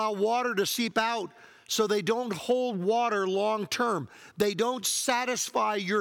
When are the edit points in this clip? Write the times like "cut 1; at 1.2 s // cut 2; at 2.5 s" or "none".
none